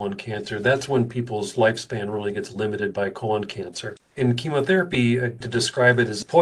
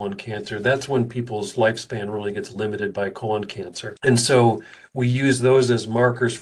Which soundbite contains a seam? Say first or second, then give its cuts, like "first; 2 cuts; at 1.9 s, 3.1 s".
first; 2 cuts; at 4.0 s, 5.4 s